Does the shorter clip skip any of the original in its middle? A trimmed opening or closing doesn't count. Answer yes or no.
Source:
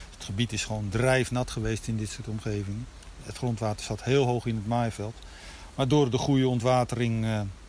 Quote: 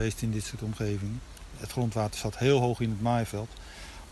no